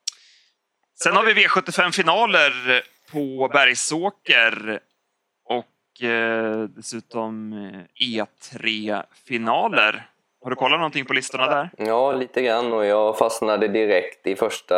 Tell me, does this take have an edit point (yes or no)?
no